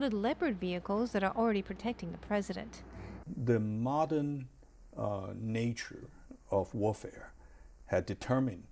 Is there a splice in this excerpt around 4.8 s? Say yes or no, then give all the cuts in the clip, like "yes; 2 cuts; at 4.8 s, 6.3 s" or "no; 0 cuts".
no; 1 cut; at 3.2 s